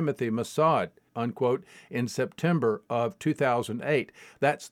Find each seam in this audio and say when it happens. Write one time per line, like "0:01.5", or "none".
0:01.1